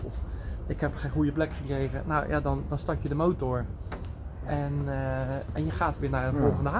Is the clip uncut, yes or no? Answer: yes